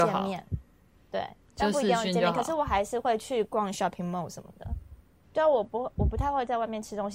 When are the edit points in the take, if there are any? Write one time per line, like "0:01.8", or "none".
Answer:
0:05.2